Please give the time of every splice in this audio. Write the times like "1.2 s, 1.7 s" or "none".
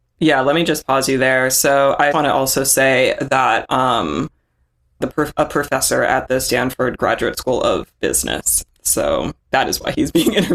2.1 s, 5.0 s